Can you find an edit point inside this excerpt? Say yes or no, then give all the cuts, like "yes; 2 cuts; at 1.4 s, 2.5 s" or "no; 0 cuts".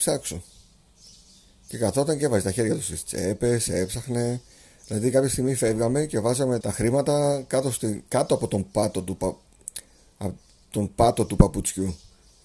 yes; 1 cut; at 6.6 s